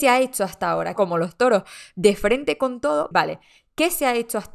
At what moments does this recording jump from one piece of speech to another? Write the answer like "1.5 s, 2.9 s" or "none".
1.0 s, 3.1 s